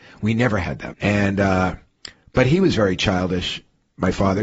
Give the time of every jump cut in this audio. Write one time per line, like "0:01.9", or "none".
0:00.9